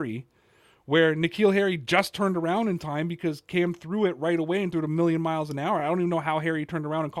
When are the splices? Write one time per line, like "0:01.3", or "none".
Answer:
none